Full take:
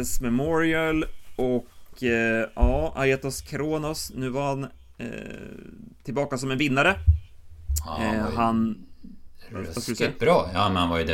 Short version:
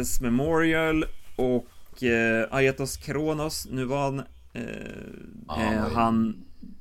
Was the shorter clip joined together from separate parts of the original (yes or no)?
yes